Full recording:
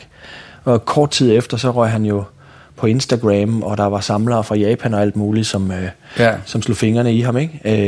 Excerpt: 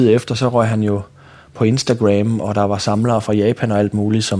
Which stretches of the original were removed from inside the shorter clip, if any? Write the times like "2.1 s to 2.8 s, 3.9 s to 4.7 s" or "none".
none